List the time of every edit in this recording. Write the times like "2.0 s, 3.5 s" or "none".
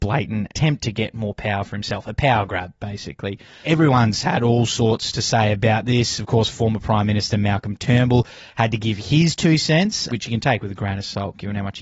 none